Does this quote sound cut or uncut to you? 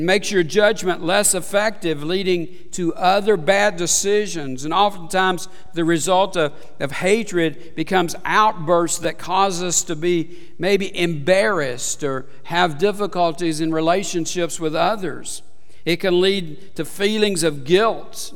uncut